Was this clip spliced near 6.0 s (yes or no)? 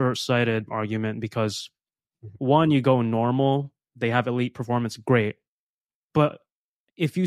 no